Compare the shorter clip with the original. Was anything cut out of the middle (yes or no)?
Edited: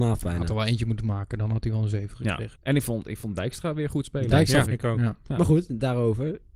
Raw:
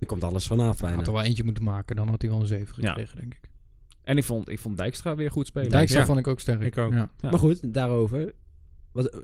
yes